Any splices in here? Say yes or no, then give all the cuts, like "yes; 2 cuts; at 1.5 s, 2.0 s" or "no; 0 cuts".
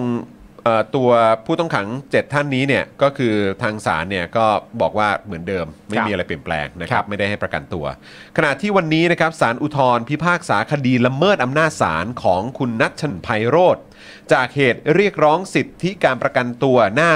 yes; 1 cut; at 13.1 s